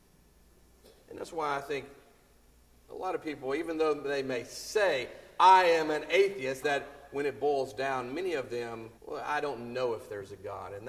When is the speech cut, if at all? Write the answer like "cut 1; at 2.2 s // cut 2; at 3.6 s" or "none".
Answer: cut 1; at 6.6 s // cut 2; at 9.0 s